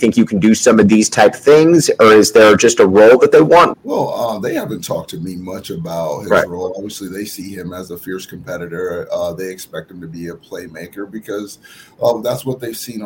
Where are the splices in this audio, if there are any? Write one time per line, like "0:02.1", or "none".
0:03.7